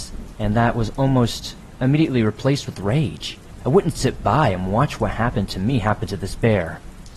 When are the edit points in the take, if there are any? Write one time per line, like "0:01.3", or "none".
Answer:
none